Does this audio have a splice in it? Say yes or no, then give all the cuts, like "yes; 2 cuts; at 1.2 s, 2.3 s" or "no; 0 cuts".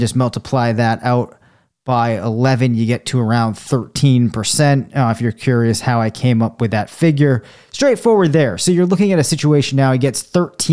no; 0 cuts